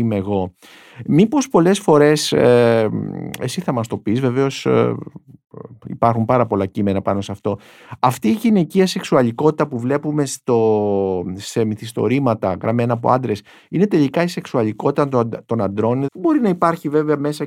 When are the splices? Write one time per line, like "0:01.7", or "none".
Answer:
0:16.1